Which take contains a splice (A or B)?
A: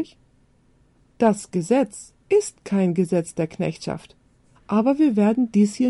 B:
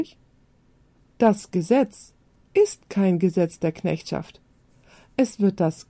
A